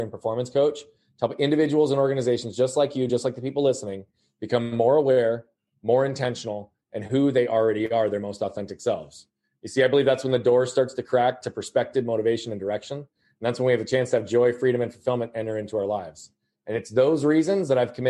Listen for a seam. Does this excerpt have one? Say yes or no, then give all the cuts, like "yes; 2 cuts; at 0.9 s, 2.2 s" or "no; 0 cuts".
no; 0 cuts